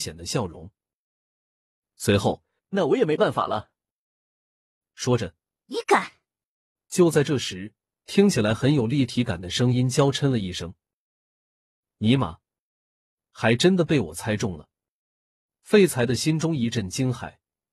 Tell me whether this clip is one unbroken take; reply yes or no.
no